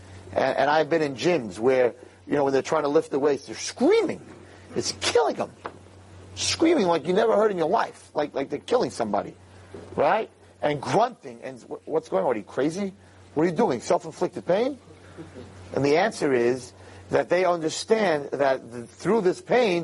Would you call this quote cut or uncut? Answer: uncut